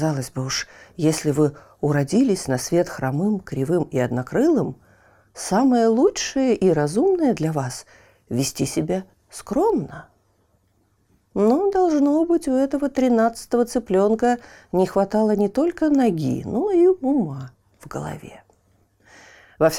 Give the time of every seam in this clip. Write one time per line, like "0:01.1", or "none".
none

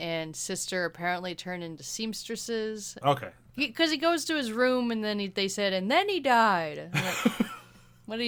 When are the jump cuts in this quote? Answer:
0:03.0

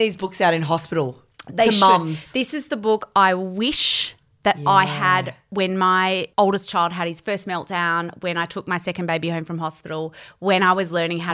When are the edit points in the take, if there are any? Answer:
0:06.3

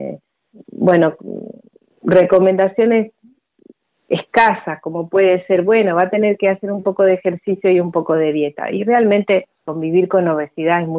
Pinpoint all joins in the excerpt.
0:09.6

